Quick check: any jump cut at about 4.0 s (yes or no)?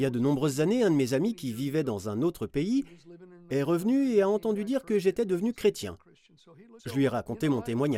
no